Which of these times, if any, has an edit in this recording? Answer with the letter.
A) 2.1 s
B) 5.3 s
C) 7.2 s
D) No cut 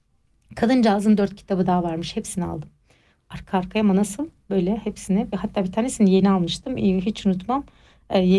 D